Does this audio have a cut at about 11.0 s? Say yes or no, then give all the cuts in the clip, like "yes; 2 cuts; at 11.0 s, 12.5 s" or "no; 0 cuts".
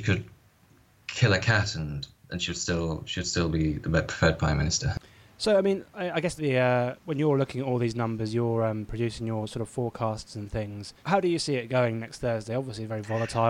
yes; 2 cuts; at 6.4 s, 11.0 s